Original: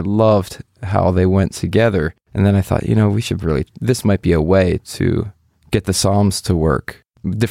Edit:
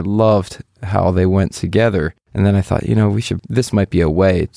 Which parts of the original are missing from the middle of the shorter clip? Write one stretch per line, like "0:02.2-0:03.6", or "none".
0:03.4-0:03.7